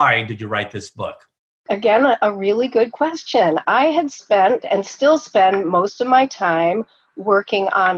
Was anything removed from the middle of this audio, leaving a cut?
yes; 1 cut; at 1.7 s

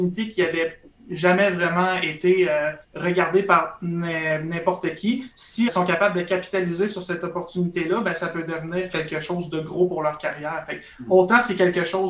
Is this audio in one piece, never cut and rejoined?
no; 2 cuts; at 2.8 s, 5.7 s

